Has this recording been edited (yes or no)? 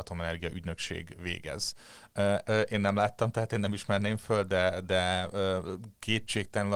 yes